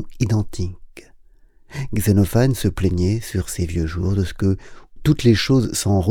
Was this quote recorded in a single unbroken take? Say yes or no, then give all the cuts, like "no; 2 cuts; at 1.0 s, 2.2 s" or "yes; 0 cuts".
no; 1 cut; at 5.0 s